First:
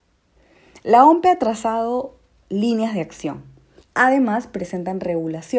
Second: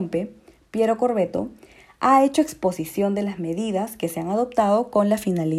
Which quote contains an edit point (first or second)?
first